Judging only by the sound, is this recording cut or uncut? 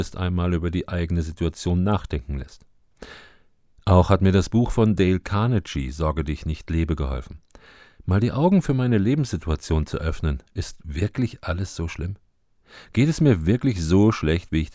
uncut